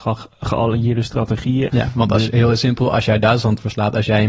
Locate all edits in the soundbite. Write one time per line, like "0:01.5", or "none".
0:01.7